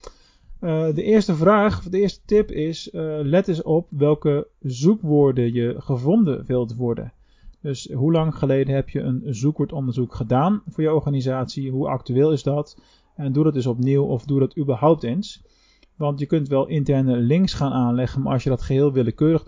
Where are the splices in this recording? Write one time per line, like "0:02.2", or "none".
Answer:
none